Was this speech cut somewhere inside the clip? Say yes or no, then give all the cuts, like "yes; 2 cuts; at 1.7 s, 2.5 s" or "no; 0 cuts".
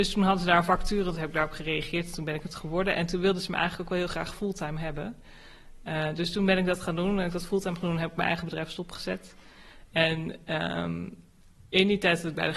no; 0 cuts